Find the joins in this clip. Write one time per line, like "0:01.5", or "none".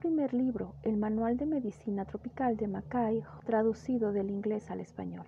0:03.4